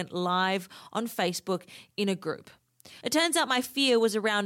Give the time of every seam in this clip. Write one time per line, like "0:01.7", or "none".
0:03.0